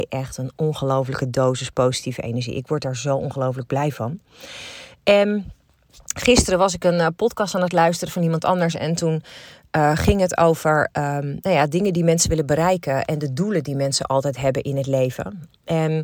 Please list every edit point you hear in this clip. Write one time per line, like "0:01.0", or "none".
none